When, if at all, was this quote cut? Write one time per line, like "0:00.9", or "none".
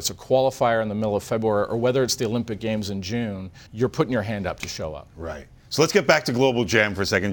0:03.7